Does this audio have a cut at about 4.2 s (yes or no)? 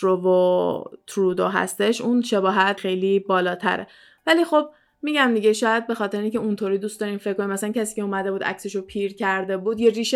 no